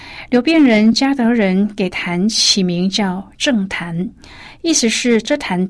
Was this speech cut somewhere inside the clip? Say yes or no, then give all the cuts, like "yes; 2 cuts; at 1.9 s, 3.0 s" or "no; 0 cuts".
no; 0 cuts